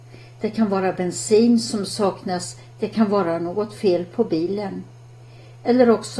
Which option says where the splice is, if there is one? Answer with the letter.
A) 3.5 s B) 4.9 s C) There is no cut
C